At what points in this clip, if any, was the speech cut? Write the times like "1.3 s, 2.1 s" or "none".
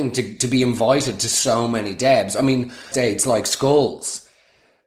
2.9 s